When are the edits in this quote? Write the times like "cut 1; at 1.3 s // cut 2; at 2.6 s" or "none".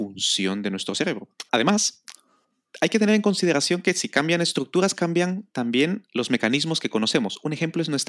cut 1; at 1.5 s

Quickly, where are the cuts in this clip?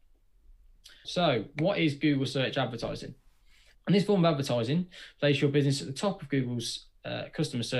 cut 1; at 1.0 s // cut 2; at 3.7 s

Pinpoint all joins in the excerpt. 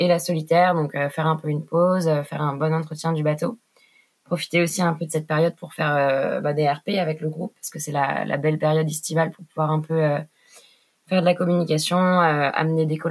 none

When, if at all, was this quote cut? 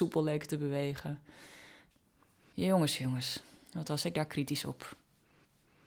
none

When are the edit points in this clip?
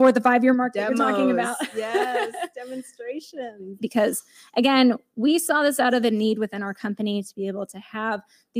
cut 1; at 3.8 s

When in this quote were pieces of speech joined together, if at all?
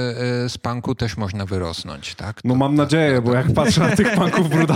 none

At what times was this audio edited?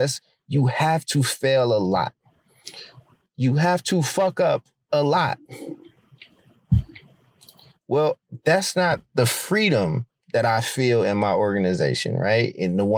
none

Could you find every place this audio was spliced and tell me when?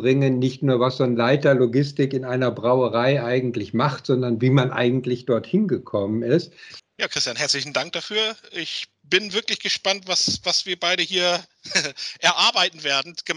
cut 1; at 6.8 s

